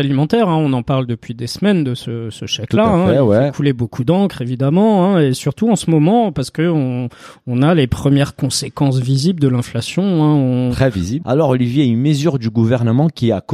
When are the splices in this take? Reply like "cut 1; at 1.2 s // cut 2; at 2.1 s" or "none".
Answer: cut 1; at 11.2 s